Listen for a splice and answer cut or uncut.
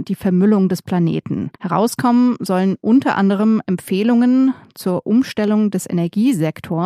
cut